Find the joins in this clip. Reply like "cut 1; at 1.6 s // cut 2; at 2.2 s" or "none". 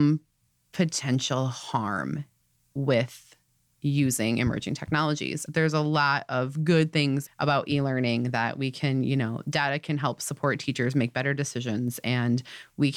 cut 1; at 5.5 s // cut 2; at 7.3 s